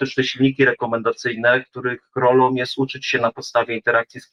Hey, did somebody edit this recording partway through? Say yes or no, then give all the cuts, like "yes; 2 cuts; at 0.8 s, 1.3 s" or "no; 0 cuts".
no; 0 cuts